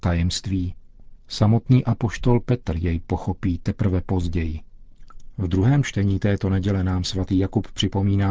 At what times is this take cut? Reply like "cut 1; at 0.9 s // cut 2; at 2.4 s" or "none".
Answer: none